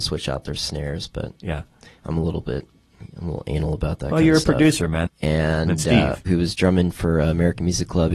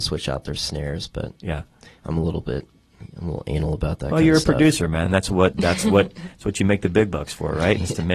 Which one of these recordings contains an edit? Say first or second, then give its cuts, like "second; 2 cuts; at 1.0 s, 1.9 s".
first; 2 cuts; at 5.1 s, 6.3 s